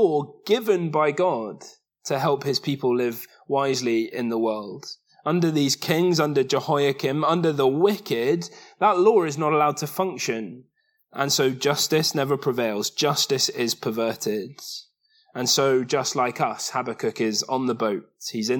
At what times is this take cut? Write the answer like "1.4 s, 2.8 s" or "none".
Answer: none